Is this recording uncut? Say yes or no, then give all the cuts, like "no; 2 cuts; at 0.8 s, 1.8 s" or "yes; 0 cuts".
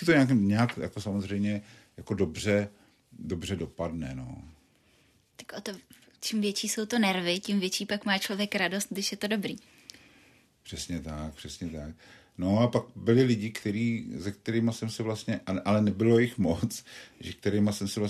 yes; 0 cuts